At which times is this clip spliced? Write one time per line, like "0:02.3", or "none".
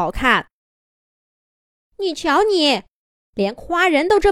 0:01.8